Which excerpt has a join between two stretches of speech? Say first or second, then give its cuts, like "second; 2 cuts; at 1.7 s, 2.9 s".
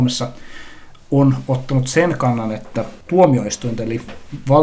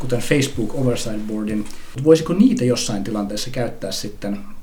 second; 1 cut; at 2.0 s